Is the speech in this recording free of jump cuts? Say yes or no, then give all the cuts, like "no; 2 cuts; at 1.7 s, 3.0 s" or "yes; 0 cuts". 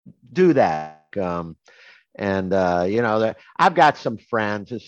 no; 1 cut; at 1.1 s